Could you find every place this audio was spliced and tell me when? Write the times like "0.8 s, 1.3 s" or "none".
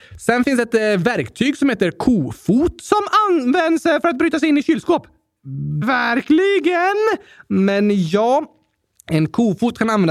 5.8 s